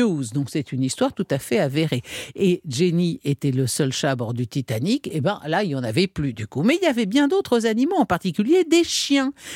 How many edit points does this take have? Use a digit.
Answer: 0